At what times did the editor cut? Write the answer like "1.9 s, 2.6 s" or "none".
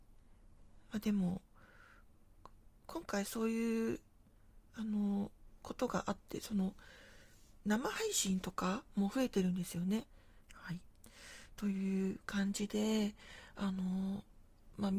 10.4 s